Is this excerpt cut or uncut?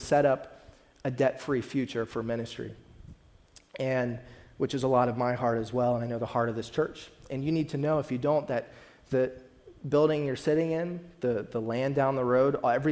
uncut